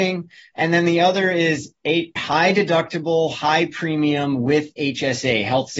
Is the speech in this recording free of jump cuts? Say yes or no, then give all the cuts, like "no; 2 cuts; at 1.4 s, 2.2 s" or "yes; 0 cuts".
no; 1 cut; at 2.2 s